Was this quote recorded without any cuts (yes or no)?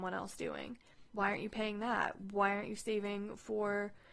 no